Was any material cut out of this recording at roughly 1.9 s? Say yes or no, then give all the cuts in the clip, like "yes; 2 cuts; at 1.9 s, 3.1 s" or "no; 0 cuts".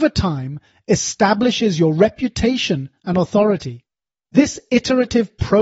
no; 1 cut; at 4.2 s